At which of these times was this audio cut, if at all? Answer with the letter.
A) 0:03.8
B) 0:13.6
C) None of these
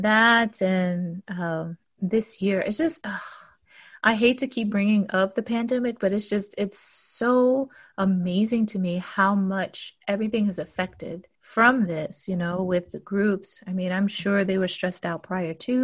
C